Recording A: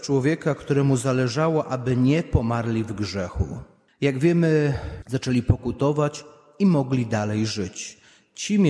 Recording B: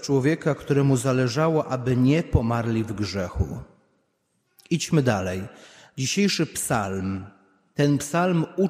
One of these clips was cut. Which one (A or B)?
A